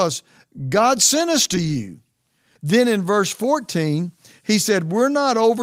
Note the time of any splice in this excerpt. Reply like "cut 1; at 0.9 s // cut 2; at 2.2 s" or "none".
cut 1; at 2.6 s